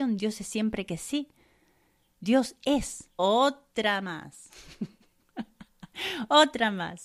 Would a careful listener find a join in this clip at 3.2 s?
yes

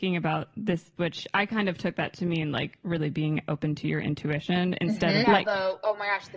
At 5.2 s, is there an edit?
yes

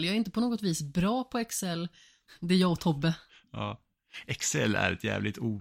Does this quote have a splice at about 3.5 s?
no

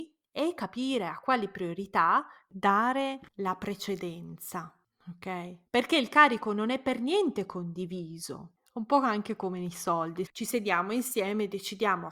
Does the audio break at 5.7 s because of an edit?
yes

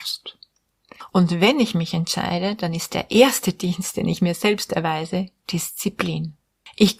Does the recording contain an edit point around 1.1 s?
yes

